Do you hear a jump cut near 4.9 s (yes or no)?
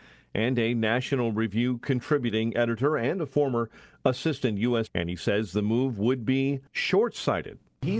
yes